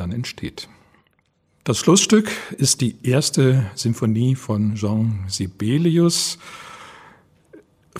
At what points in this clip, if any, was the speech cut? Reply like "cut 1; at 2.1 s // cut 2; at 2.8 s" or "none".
none

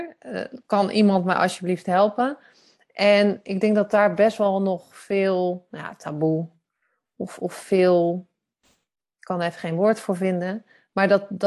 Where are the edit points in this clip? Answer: none

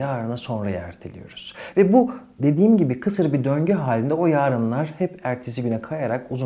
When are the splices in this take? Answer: none

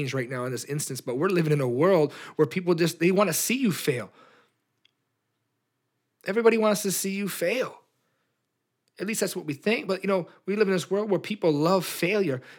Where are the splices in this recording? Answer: none

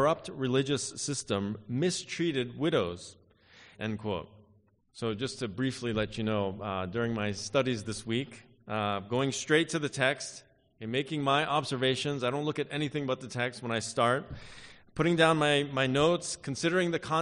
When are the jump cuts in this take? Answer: cut 1; at 3.7 s

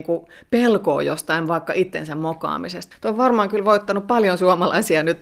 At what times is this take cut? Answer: cut 1; at 2.9 s

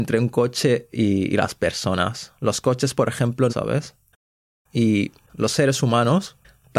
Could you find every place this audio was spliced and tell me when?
cut 1; at 3.5 s

